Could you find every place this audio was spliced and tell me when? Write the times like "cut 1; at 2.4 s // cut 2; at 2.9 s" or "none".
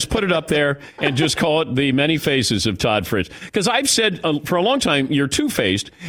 cut 1; at 1.0 s